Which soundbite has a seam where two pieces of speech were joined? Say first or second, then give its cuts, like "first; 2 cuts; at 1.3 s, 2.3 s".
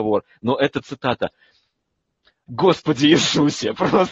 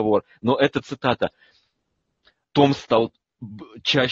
first; 1 cut; at 2.5 s